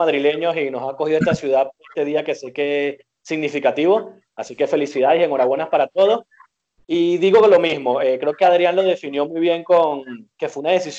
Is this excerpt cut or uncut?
uncut